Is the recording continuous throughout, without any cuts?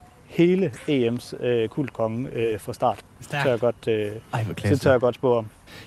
yes; 0 cuts

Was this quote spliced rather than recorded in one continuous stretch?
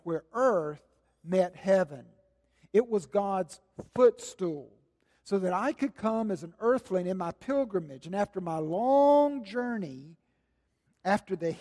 no; 0 cuts

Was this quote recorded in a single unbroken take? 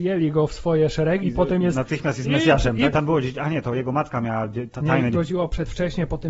no; 3 cuts; at 1.2 s, 2.9 s, 5.1 s

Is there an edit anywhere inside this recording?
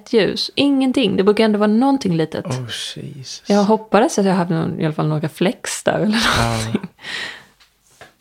no; 0 cuts

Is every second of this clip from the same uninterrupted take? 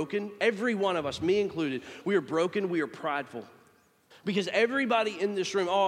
no; 1 cut; at 4.1 s

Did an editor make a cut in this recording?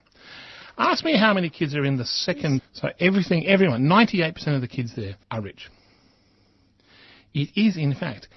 yes; 2 cuts; at 2.6 s, 5.2 s

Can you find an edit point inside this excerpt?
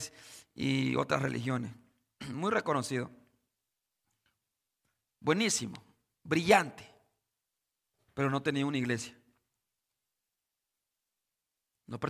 no; 0 cuts

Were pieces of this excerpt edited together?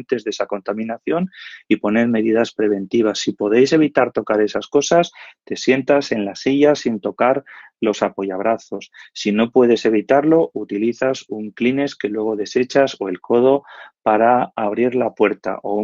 no; 0 cuts

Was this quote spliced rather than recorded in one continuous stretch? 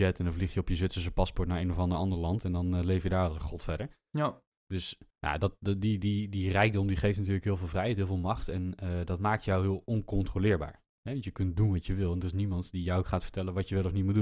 no; 0 cuts

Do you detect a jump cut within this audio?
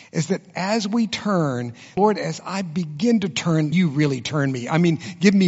yes; 2 cuts; at 2.0 s, 3.7 s

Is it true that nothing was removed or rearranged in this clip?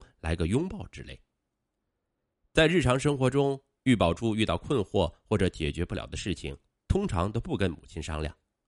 yes; 0 cuts

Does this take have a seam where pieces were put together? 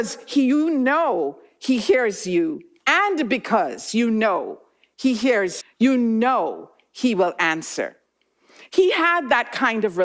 yes; 2 cuts; at 5.6 s, 8.7 s

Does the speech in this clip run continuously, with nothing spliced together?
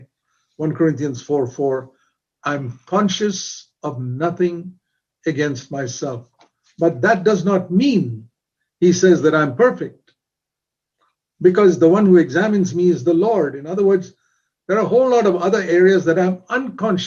yes; 0 cuts

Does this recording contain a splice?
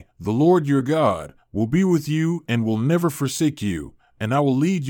no; 0 cuts

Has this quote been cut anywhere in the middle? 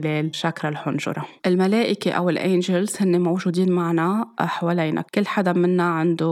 yes; 1 cut; at 1.4 s

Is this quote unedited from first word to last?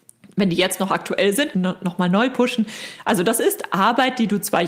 no; 1 cut; at 1.5 s

